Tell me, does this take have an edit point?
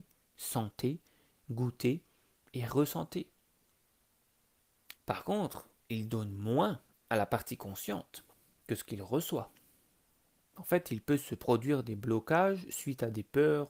yes; 1 cut; at 5.0 s

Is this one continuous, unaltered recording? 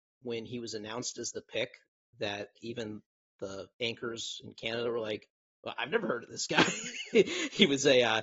no; 1 cut; at 2.6 s

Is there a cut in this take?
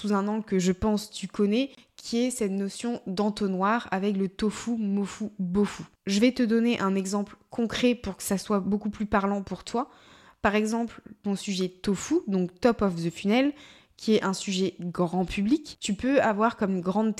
no; 0 cuts

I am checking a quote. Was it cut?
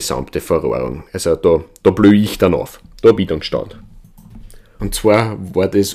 yes; 1 cut; at 4.8 s

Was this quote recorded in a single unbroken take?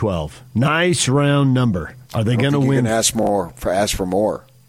no; 1 cut; at 2.0 s

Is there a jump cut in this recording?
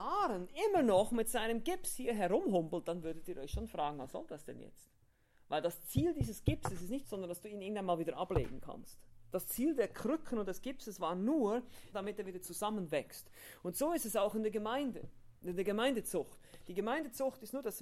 yes; 2 cuts; at 7.0 s, 11.9 s

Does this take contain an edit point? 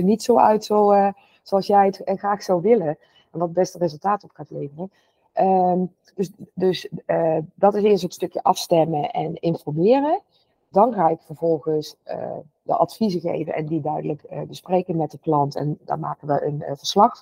no; 0 cuts

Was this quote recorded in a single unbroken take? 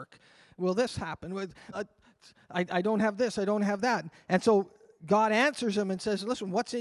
no; 1 cut; at 1.7 s

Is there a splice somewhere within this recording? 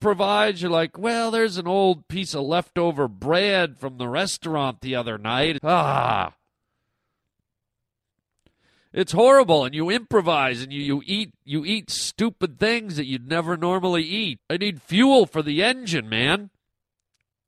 yes; 2 cuts; at 5.6 s, 14.4 s

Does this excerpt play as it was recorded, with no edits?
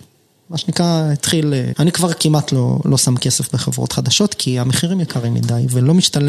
no; 1 cut; at 1.7 s

